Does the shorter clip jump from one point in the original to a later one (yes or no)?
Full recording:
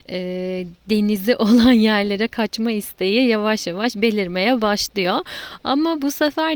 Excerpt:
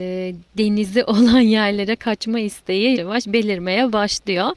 yes